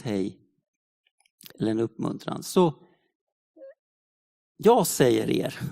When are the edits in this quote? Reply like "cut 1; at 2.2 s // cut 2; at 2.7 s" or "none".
cut 1; at 1.5 s